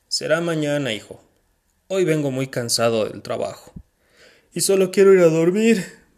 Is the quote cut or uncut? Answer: uncut